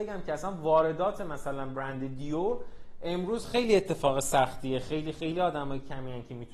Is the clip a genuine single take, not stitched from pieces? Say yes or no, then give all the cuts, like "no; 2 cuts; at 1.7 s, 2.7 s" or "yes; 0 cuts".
yes; 0 cuts